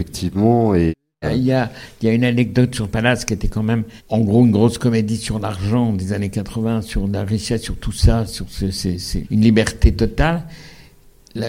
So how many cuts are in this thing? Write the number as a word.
two